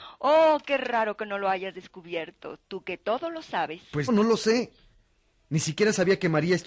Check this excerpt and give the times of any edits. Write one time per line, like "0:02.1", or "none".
0:04.1